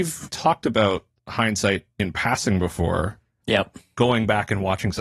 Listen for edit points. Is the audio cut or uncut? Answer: cut